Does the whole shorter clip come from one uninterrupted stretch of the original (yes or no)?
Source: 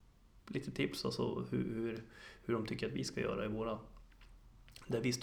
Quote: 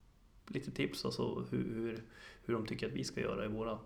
yes